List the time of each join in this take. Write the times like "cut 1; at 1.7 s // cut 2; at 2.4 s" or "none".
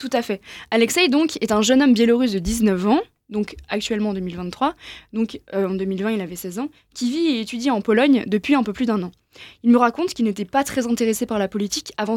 none